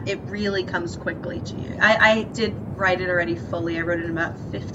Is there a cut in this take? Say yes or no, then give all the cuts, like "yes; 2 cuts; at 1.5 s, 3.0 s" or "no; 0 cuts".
yes; 1 cut; at 1.7 s